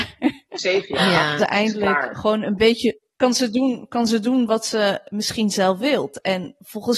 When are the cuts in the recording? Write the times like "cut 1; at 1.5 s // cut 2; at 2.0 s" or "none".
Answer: cut 1; at 1.4 s // cut 2; at 3.1 s